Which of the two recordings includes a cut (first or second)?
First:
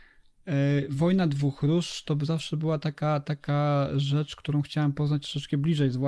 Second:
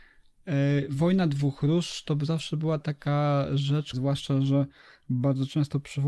second